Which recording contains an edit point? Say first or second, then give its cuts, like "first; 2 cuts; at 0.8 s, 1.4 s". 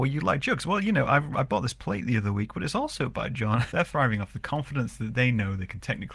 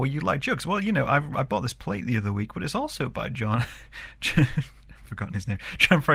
first; 1 cut; at 3.7 s